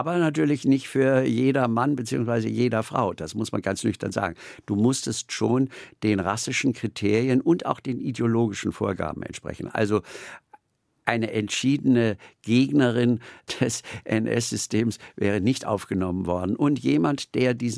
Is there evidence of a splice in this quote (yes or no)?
no